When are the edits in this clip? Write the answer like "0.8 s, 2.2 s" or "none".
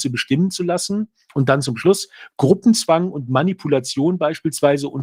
none